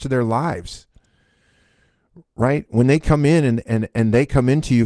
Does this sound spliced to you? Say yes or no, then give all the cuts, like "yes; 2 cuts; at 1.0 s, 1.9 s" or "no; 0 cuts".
no; 0 cuts